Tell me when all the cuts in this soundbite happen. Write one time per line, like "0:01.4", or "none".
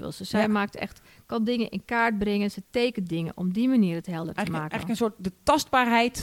none

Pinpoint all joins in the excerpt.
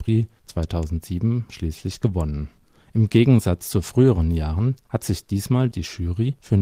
0:04.8

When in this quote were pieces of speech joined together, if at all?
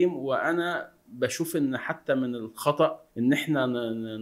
0:03.1

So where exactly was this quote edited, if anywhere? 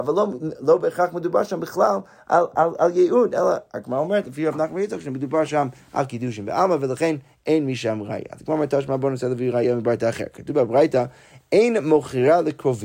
none

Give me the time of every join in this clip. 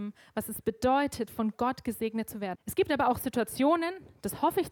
0:02.5

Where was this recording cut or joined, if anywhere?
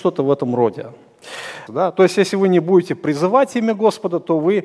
0:01.7

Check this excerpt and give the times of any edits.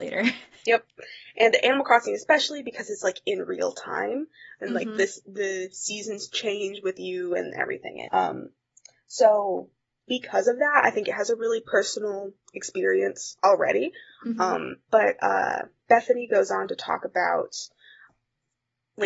0:08.1
0:14.8

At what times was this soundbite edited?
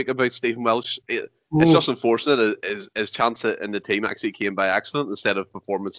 none

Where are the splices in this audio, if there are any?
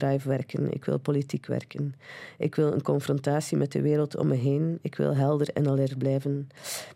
none

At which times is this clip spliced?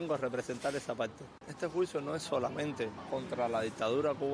0:01.4

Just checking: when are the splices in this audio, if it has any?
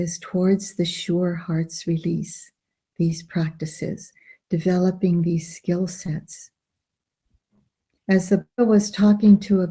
0:08.0

